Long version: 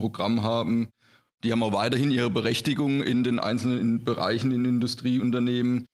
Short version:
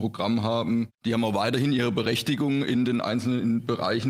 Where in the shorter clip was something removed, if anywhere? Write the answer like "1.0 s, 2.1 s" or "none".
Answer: 0.9 s